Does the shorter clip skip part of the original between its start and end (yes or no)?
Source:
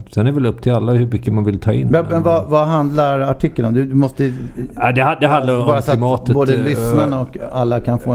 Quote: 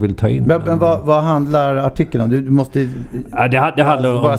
no